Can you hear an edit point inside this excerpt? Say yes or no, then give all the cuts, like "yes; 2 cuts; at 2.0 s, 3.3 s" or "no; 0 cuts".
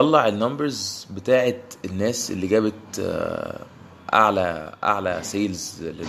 no; 0 cuts